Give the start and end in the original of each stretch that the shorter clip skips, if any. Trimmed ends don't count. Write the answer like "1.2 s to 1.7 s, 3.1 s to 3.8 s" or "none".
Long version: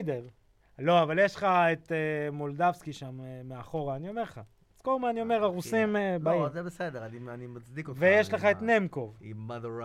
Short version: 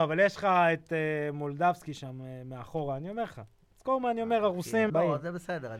5.9 s to 6.2 s

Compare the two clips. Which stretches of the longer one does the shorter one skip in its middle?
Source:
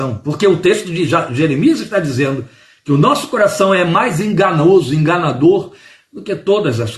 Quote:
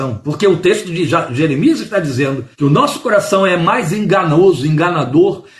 2.5 s to 2.8 s

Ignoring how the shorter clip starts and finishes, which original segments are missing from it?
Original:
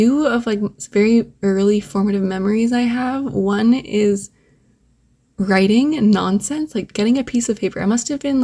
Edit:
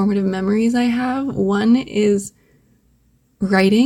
none

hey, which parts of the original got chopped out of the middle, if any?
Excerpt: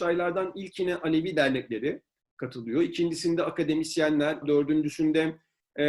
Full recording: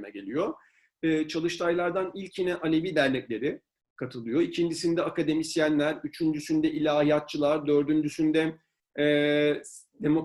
6.0 s to 7.6 s

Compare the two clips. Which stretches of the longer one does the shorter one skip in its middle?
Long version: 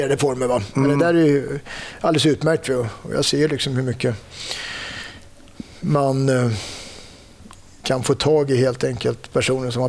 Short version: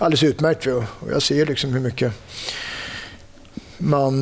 none

